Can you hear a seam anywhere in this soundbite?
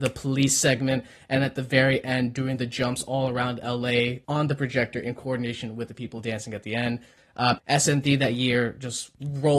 yes; 1 cut; at 7.6 s

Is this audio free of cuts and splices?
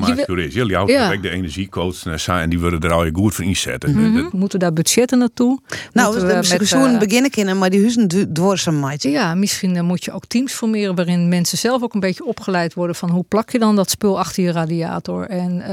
no; 1 cut; at 4.3 s

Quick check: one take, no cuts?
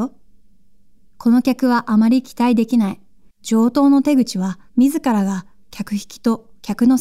no; 2 cuts; at 3.3 s, 4.7 s

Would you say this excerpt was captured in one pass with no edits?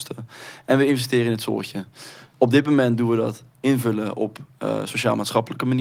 yes; 0 cuts

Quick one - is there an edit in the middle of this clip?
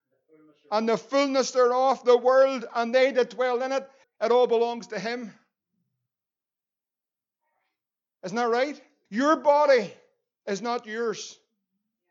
yes; 2 cuts; at 4.0 s, 9.1 s

